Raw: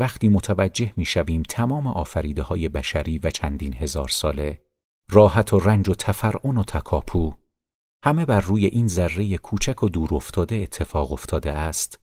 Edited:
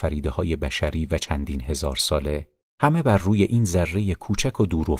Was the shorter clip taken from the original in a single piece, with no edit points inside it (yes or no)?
no